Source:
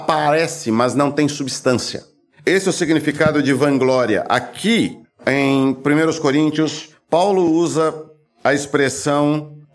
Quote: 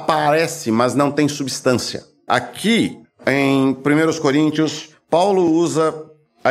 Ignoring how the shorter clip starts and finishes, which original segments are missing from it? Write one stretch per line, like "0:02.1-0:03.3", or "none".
0:02.3-0:04.3